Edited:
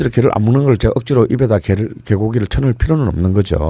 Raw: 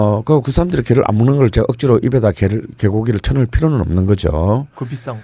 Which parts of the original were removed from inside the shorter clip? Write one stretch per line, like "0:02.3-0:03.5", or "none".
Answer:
none